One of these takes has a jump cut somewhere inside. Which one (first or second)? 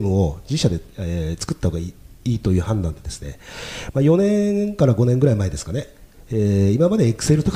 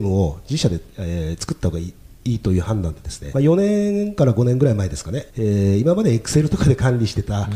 second